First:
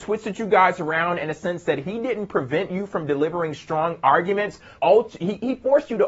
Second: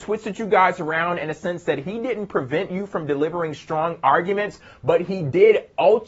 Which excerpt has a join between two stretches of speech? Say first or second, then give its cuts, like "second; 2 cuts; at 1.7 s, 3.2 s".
first; 1 cut; at 4.8 s